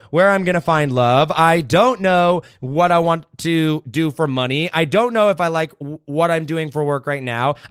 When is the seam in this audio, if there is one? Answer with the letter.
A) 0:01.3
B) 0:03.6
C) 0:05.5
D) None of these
D